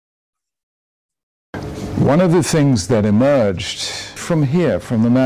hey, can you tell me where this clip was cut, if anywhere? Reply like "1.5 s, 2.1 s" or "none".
4.2 s

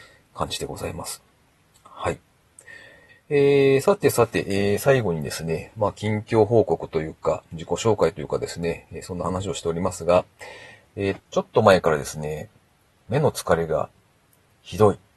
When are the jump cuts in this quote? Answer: 3.1 s, 11.2 s

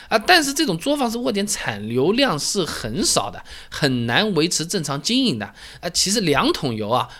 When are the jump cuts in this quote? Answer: 5.8 s

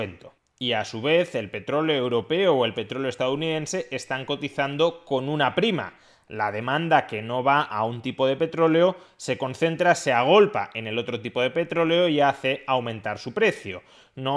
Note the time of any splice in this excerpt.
none

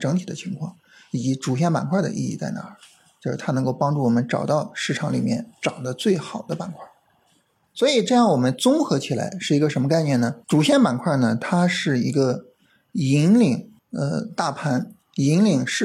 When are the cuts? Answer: 10.4 s, 13.8 s

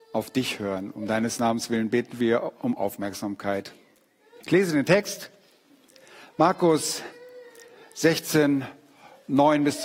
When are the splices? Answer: 4.4 s

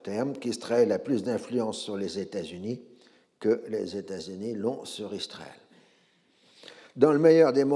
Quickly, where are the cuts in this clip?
none

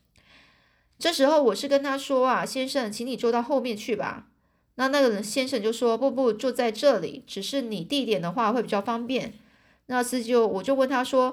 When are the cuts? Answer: 6.0 s

